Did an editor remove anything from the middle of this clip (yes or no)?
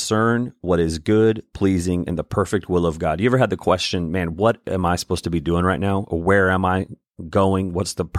no